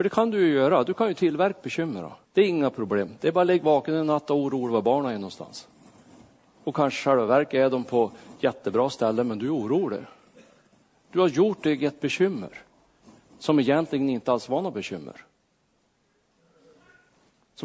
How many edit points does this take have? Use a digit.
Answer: 1